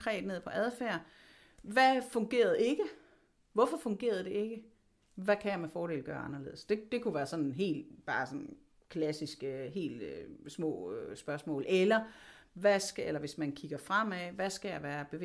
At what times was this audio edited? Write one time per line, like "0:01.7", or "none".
none